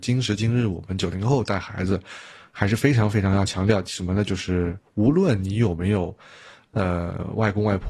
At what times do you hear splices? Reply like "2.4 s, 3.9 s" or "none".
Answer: none